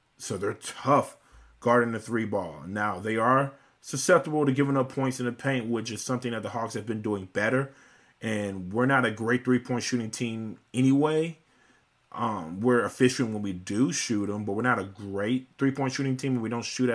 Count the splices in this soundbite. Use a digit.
0